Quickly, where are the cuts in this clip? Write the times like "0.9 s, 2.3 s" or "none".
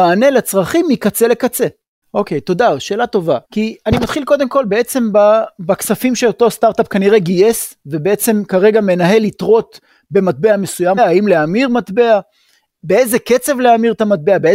2.0 s, 3.4 s, 11.0 s